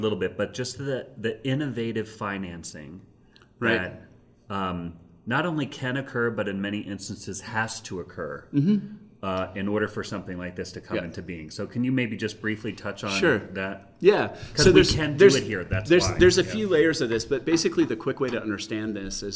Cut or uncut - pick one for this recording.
uncut